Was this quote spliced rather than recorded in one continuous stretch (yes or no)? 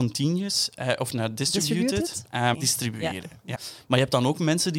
yes